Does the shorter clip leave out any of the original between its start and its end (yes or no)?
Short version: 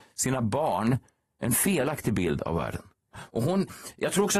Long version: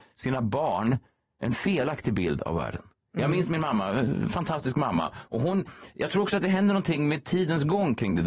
yes